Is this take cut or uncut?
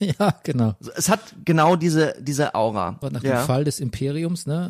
cut